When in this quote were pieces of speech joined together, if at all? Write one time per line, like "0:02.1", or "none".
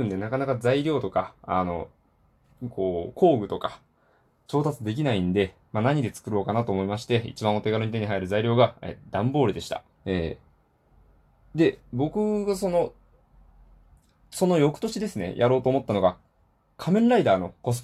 0:10.0